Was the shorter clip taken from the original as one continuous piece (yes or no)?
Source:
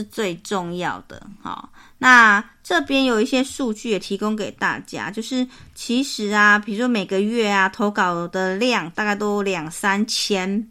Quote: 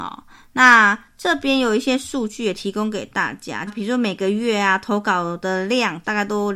no